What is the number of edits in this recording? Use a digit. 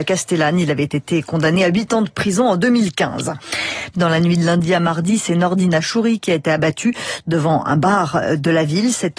1